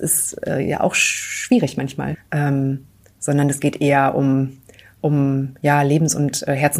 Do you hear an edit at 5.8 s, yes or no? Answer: no